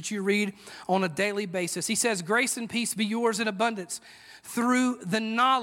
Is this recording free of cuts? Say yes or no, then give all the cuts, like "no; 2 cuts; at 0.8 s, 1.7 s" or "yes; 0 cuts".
yes; 0 cuts